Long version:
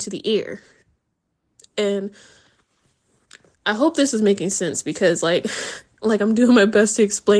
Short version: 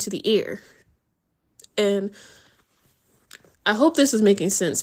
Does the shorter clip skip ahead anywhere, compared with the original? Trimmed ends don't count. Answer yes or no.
no